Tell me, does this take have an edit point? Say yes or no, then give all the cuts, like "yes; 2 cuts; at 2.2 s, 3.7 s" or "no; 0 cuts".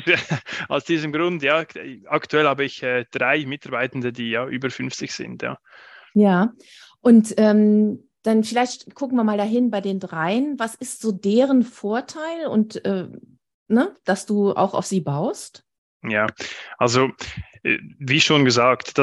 no; 0 cuts